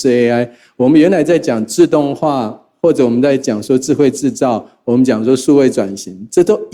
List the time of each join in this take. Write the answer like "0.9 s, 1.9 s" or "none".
none